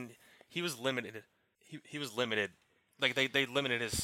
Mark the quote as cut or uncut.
cut